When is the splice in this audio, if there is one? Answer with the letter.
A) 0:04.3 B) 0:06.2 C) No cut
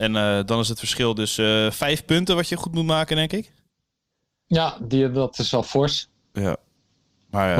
C